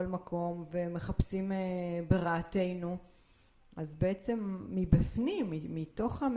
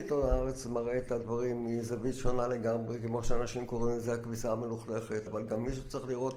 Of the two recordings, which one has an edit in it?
second; 1 cut; at 5.3 s

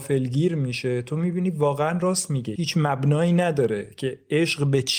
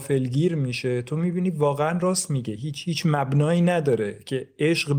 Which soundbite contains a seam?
first; 1 cut; at 2.6 s

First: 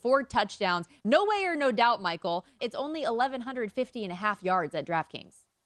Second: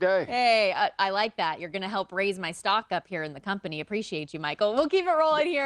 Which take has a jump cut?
first; 2 cuts; at 1.0 s, 2.6 s

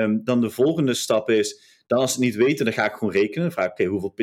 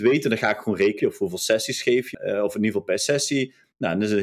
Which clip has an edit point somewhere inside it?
second; 2 cuts; at 1.0 s, 2.1 s

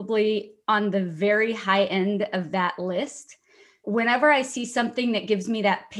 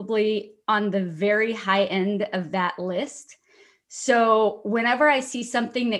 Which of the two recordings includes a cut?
first; 1 cut; at 3.8 s

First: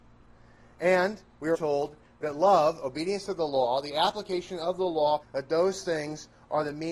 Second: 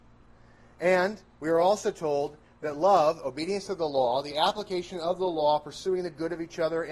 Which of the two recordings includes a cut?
first; 2 cuts; at 1.5 s, 5.2 s

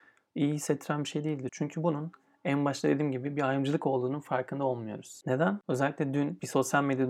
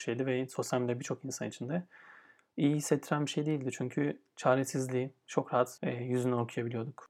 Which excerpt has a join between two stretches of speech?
first; 2 cuts; at 1.5 s, 5.2 s

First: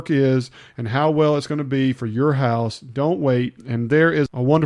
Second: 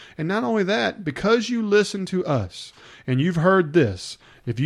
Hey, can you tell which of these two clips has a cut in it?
first; 1 cut; at 3.6 s

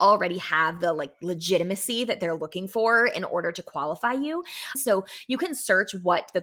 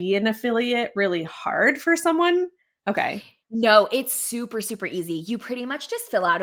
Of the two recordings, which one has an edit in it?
first; 1 cut; at 4.7 s

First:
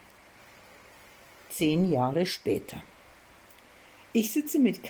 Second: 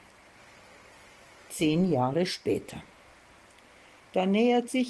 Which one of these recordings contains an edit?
second; 1 cut; at 4.0 s

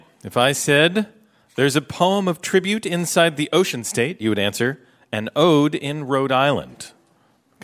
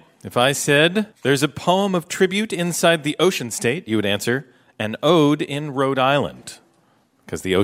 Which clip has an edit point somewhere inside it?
second; 1 cut; at 1.1 s

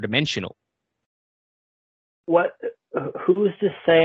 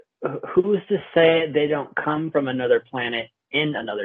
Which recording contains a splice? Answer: first; 1 cut; at 2.2 s

